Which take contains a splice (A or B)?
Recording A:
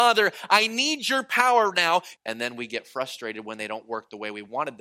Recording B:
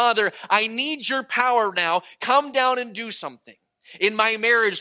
A